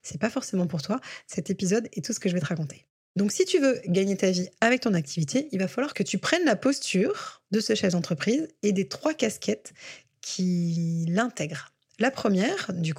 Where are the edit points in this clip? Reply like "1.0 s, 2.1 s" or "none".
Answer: none